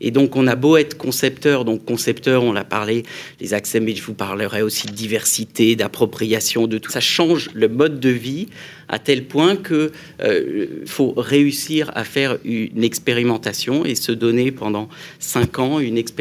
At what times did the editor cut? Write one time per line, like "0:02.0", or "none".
0:06.9
0:10.8